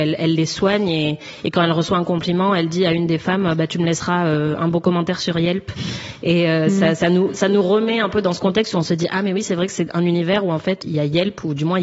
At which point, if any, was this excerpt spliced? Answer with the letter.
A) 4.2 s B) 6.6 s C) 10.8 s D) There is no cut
C